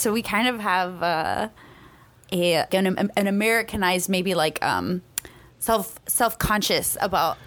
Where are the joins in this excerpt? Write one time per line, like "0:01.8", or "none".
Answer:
0:02.7